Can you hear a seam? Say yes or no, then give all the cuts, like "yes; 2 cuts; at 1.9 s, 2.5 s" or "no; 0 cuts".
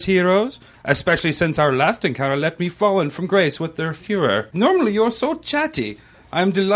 yes; 1 cut; at 4.5 s